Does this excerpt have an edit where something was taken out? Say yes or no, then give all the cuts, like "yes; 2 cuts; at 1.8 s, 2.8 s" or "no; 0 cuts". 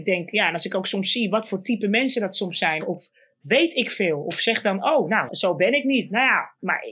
yes; 2 cuts; at 2.8 s, 5.3 s